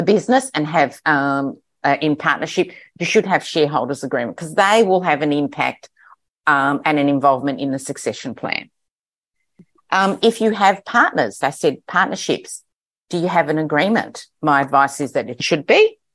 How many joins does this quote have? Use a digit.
2